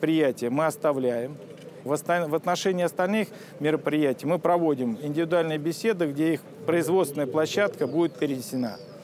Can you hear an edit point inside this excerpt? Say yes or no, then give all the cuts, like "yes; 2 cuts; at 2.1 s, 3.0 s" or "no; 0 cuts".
yes; 1 cut; at 1.9 s